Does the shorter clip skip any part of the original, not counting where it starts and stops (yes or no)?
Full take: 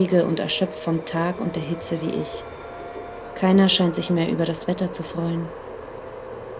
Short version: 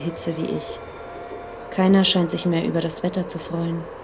no